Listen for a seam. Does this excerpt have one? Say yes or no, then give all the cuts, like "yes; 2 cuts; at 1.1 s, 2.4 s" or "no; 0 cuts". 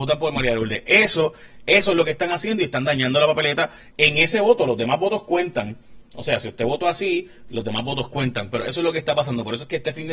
no; 0 cuts